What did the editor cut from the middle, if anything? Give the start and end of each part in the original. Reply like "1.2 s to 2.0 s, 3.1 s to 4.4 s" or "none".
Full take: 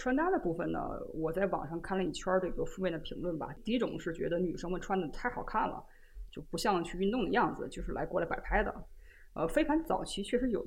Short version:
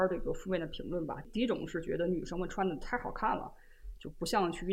none